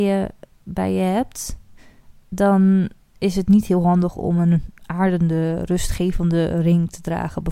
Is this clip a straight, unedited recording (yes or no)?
yes